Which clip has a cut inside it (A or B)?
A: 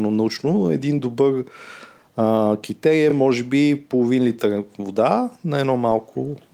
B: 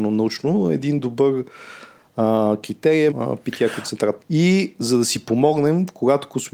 B